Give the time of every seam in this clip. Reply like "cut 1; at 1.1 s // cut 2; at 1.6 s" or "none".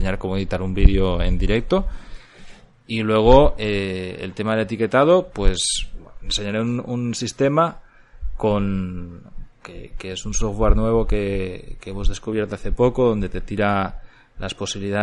none